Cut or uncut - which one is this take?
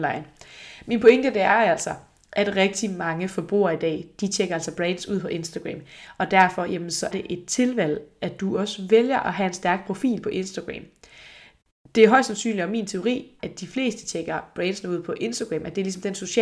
cut